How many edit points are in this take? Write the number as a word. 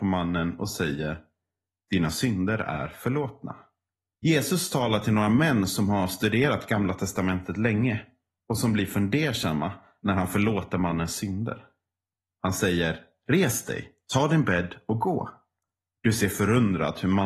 two